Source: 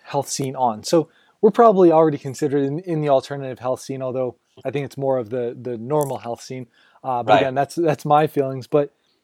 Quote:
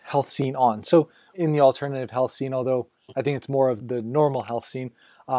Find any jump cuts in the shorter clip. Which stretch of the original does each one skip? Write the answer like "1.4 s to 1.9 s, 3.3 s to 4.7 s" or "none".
1.3 s to 2.8 s, 5.3 s to 5.5 s

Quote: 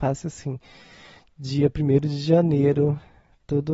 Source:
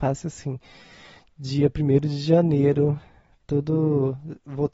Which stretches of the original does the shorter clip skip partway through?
none

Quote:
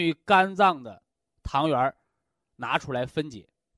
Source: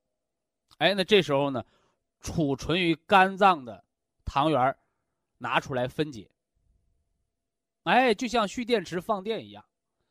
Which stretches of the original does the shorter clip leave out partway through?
none

